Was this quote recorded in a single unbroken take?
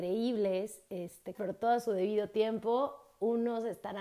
no; 1 cut; at 1.3 s

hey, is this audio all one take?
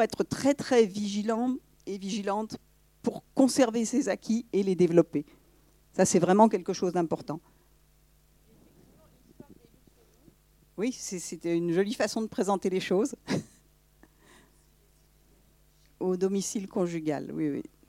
yes; 0 cuts

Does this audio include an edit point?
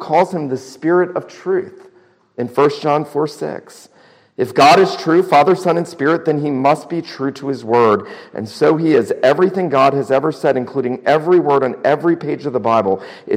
no; 0 cuts

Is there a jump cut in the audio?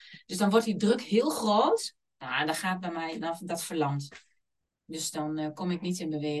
no; 0 cuts

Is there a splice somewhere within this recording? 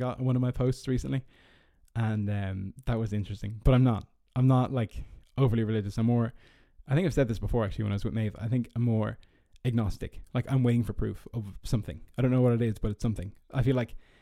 no; 0 cuts

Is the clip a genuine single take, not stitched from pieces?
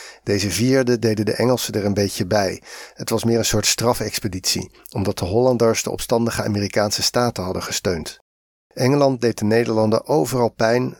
yes; 0 cuts

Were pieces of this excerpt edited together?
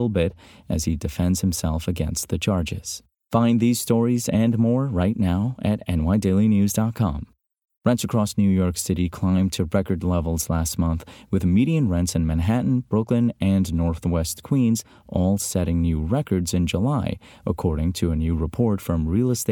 no; 0 cuts

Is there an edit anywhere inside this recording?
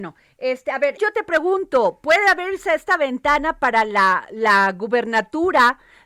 yes; 1 cut; at 1.0 s

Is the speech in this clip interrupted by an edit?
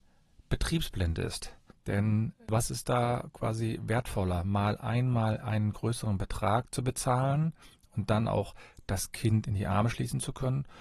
yes; 1 cut; at 1.7 s

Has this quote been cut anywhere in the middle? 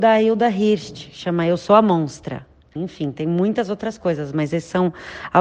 yes; 1 cut; at 2.8 s

